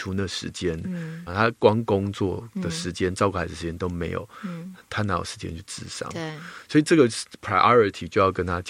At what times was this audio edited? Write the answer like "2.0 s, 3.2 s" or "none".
1.3 s